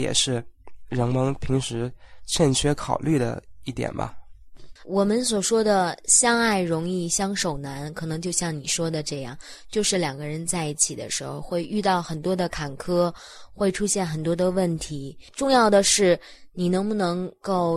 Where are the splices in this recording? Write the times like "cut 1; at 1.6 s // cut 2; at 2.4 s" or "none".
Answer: cut 1; at 4.8 s